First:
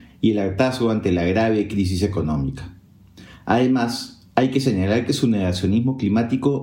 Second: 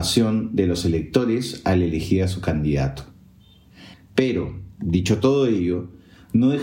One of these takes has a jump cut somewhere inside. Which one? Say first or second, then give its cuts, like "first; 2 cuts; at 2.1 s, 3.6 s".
second; 1 cut; at 3.9 s